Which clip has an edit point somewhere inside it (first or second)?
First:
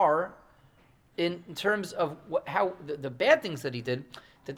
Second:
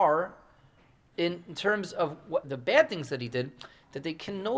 second